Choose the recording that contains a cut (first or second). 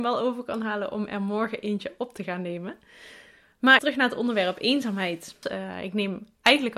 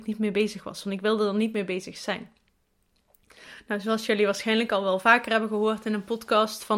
first